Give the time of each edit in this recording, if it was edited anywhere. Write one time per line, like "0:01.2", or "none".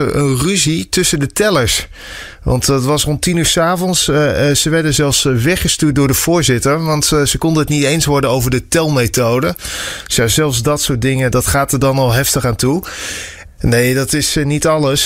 0:11.3
0:13.5